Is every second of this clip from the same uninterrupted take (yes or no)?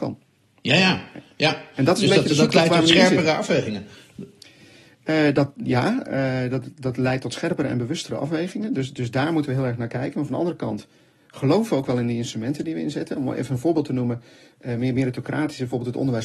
yes